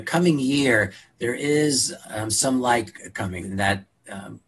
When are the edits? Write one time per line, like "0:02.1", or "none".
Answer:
0:03.4